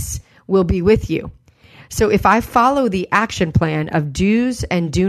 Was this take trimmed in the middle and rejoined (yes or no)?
no